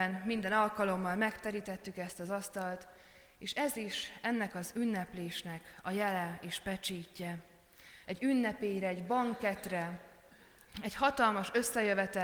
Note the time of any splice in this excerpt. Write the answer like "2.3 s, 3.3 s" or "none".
8.0 s